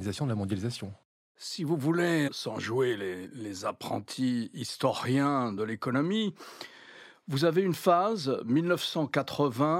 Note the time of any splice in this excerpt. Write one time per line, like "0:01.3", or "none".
0:02.3